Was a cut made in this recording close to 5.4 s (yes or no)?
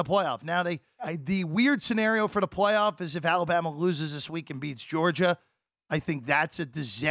no